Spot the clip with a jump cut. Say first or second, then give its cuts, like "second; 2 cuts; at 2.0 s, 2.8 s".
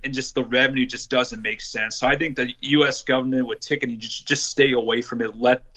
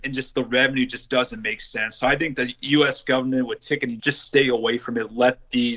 second; 1 cut; at 4.0 s